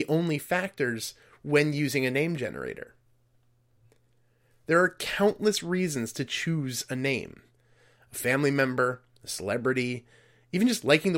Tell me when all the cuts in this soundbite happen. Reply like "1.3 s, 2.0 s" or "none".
none